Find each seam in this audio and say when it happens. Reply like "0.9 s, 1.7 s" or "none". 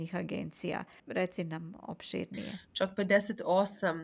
1.0 s